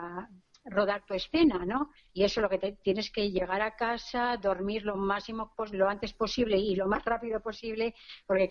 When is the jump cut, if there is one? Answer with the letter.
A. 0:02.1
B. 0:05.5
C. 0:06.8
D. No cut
A